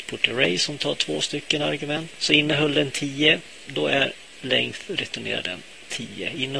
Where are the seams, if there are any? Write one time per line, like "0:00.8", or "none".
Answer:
0:02.2
0:03.6